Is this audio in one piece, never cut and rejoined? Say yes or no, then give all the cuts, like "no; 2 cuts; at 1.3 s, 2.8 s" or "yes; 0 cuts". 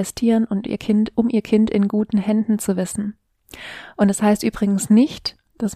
yes; 0 cuts